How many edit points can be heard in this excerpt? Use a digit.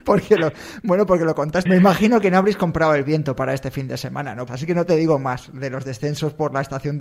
2